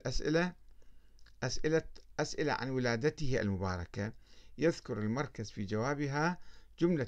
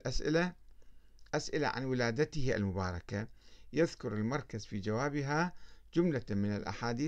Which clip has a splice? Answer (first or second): second